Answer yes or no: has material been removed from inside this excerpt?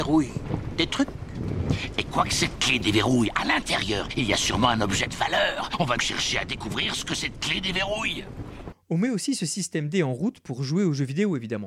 yes